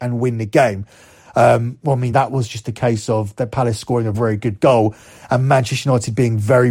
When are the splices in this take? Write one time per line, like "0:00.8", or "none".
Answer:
0:02.1
0:04.1